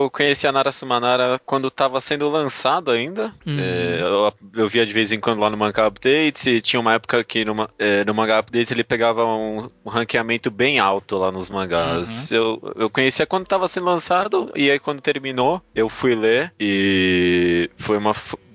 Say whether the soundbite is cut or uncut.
uncut